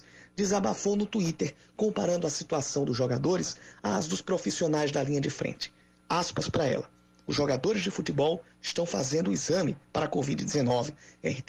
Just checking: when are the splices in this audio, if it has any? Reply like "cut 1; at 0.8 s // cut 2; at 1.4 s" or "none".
none